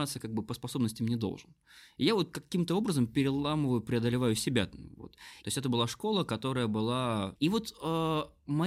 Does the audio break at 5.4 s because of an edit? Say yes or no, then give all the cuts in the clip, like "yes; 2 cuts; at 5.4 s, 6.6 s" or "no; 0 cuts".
yes; 2 cuts; at 5.4 s, 7.4 s